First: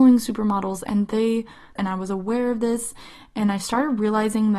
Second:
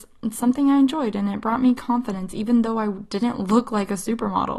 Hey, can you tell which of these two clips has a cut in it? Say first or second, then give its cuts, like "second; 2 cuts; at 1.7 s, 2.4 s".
first; 1 cut; at 1.8 s